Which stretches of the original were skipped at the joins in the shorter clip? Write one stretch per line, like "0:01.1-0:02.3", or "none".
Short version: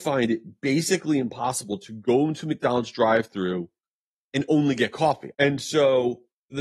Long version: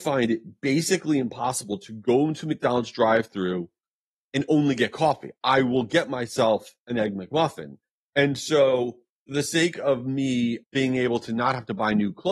0:05.3-0:08.1